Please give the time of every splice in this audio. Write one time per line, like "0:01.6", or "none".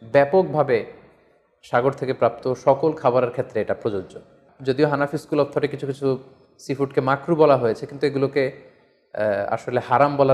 none